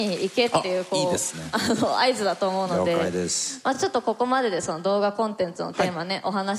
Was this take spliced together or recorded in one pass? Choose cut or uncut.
uncut